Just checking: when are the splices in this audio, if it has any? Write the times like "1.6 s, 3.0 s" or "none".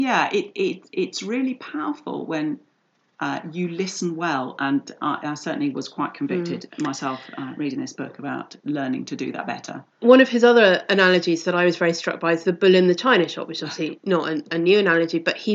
none